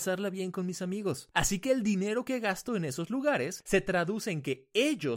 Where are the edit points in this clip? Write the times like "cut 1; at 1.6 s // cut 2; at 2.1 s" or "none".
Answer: cut 1; at 1.3 s